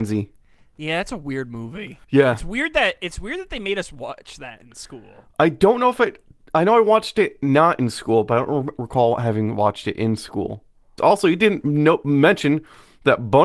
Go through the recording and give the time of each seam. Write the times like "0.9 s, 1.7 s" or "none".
2.0 s, 11.0 s